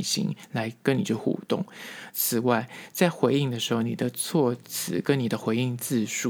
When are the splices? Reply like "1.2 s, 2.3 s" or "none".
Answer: 2.1 s